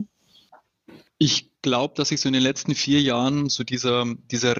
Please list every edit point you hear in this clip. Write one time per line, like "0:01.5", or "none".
none